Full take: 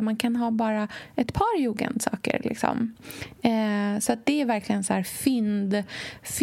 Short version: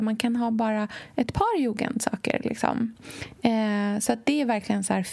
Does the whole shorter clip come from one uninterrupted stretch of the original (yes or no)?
yes